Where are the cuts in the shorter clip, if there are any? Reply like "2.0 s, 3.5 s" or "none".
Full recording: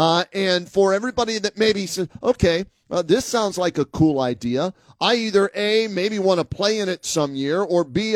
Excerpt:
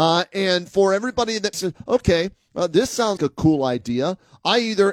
1.5 s, 3.2 s